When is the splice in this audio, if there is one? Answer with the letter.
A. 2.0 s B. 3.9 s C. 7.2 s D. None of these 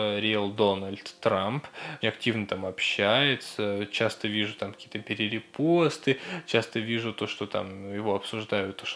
A